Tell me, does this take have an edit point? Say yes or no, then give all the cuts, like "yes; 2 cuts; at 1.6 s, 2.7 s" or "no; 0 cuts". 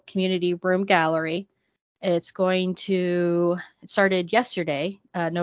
no; 0 cuts